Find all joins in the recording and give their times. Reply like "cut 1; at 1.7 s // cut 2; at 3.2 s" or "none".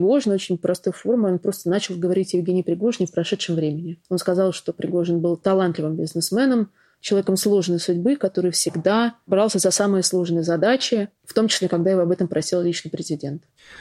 cut 1; at 4.0 s